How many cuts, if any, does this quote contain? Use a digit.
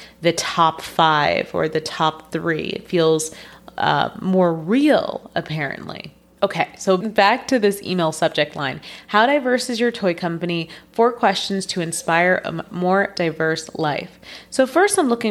0